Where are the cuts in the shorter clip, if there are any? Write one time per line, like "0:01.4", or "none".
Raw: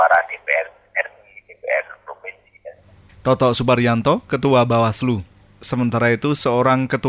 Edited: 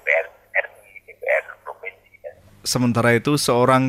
0:02.5